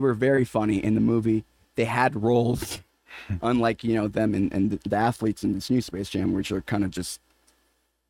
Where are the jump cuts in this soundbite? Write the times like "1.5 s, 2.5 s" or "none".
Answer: none